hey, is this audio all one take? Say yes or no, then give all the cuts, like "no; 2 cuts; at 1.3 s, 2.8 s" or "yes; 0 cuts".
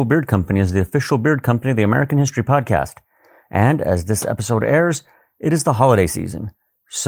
yes; 0 cuts